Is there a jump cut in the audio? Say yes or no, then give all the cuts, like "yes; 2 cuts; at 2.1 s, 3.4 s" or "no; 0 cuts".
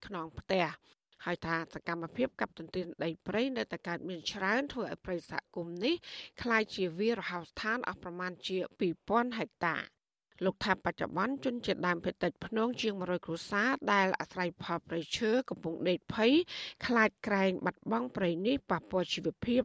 no; 0 cuts